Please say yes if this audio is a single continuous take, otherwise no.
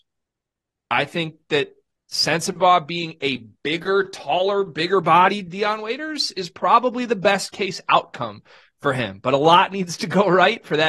yes